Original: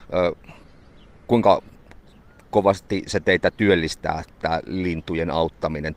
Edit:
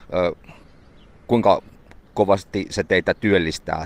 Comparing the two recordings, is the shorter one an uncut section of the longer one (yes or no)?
no